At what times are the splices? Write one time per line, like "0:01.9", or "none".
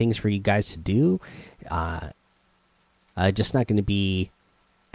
0:03.1